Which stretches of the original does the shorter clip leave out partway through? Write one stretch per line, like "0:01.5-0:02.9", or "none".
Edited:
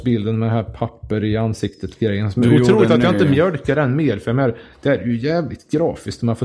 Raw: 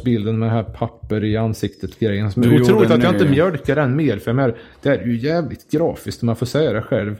none